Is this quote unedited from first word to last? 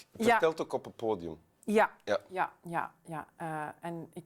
yes; 0 cuts

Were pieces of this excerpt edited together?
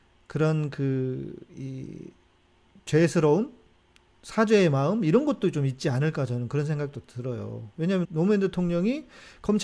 yes; 1 cut; at 8.0 s

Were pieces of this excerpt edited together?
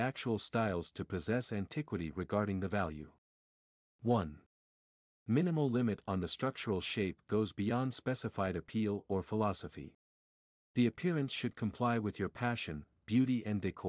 no; 0 cuts

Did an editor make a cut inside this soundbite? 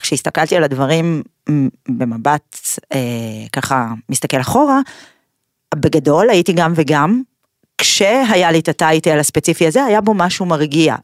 no; 0 cuts

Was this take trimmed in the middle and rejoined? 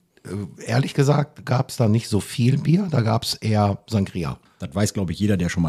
yes; 1 cut; at 4.5 s

